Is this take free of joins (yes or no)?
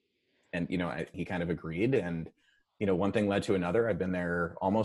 no